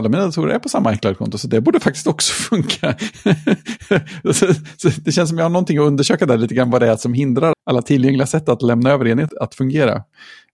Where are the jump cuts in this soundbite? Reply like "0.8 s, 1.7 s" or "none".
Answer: 7.5 s, 9.3 s